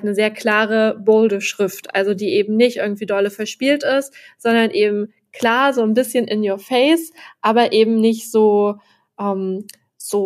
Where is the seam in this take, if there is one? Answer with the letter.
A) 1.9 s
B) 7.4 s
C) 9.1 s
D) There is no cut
D